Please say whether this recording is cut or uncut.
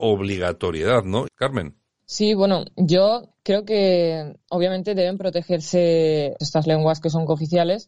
cut